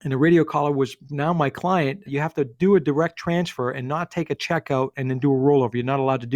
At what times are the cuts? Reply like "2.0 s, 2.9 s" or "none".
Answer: 2.1 s